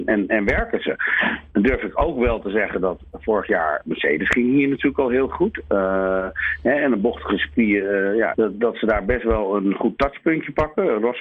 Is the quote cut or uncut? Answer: cut